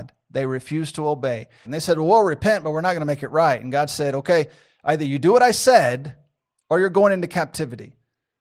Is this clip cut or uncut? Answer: cut